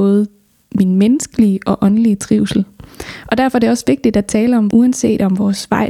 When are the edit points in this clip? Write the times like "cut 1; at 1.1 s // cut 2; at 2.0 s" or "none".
cut 1; at 4.7 s